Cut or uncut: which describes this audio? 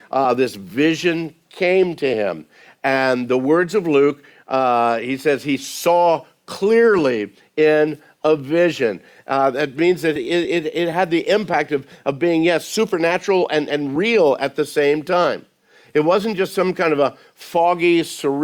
uncut